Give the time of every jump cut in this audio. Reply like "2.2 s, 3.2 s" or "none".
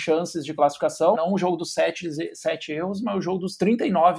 1.1 s

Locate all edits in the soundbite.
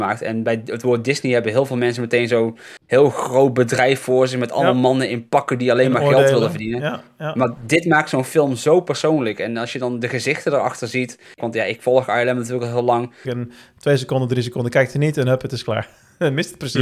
11.4 s, 13.2 s

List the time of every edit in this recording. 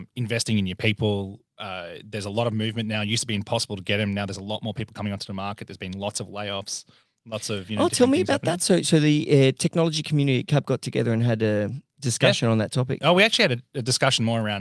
none

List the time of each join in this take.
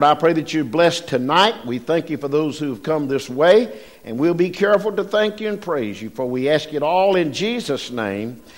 none

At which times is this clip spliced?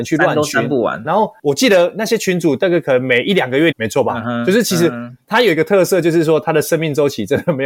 1.0 s, 3.7 s

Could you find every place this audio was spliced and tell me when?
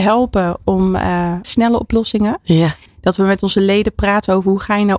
1.4 s, 2.9 s

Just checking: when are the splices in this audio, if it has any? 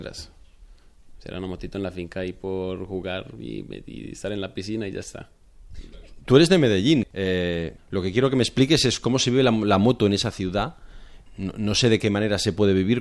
none

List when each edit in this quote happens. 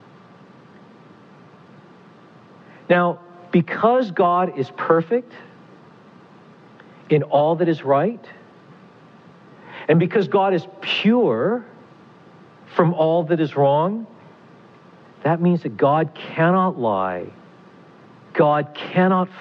none

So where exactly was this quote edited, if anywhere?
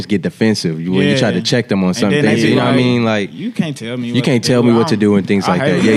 none

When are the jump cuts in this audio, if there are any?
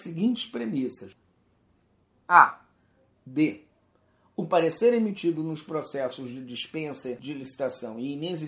3.2 s

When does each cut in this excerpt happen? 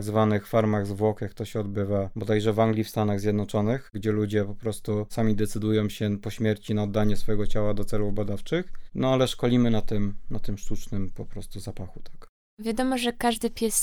none

